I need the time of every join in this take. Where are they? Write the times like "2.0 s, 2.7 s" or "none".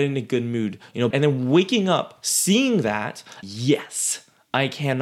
1.1 s, 3.4 s